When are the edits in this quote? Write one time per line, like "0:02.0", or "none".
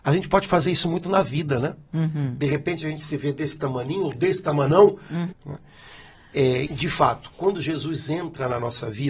0:05.3
0:06.6

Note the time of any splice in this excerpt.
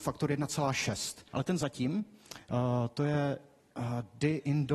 0:01.3

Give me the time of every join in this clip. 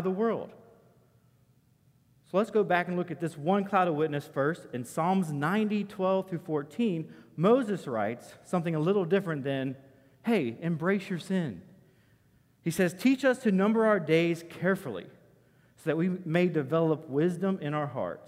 none

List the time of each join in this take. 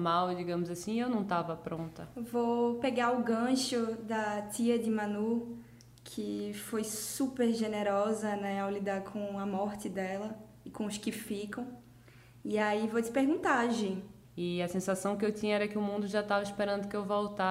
0:14.2

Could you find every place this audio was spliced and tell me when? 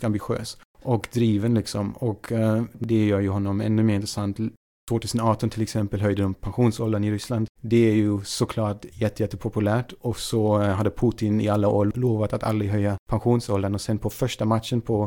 0:04.7
0:07.6

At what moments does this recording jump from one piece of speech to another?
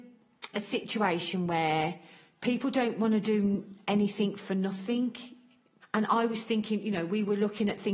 0:05.8

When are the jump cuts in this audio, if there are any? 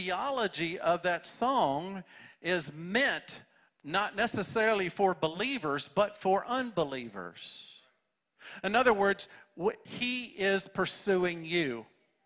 0:09.8

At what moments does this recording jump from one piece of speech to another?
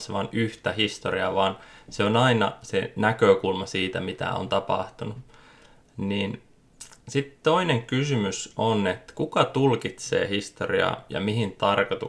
none

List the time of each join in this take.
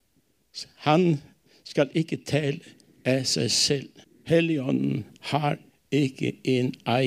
none

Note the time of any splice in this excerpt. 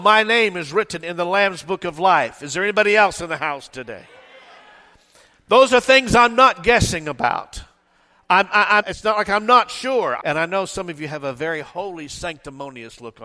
0:08.8
0:10.2

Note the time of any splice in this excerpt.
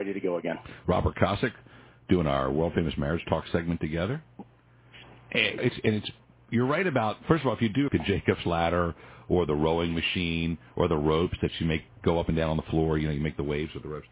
0:05.6
0:07.9

